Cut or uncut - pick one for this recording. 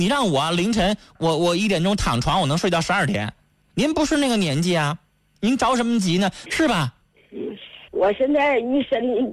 cut